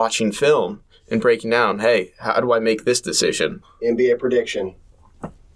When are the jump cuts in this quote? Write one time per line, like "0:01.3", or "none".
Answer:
0:03.6